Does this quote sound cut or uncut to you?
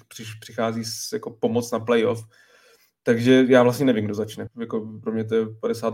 cut